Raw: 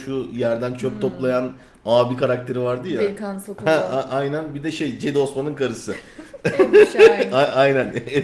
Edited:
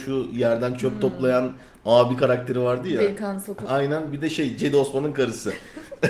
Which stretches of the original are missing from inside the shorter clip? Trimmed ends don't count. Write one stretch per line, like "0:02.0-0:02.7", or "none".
0:03.7-0:04.1